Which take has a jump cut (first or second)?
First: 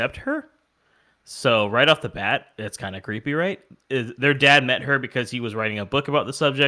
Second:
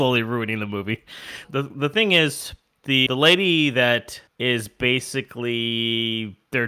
second